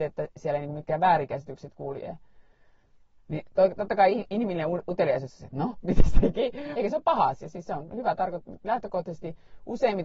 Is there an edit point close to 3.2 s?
yes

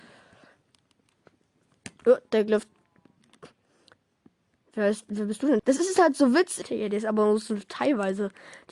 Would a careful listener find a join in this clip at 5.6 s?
yes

